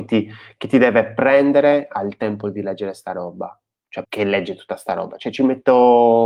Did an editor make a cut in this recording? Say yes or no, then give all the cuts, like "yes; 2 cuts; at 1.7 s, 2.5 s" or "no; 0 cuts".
yes; 1 cut; at 4.0 s